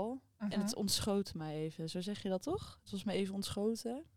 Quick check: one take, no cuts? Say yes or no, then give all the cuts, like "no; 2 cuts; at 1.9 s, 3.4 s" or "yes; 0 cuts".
yes; 0 cuts